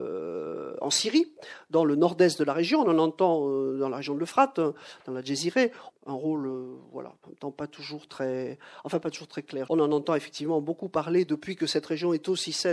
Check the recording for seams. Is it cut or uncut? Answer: cut